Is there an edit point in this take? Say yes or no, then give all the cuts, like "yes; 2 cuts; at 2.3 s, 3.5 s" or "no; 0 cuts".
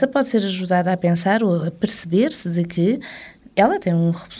no; 0 cuts